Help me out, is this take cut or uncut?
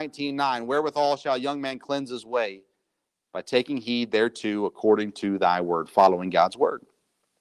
uncut